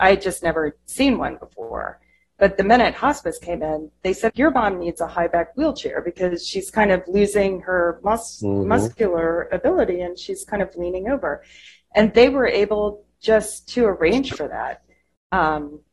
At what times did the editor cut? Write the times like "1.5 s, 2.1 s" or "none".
4.3 s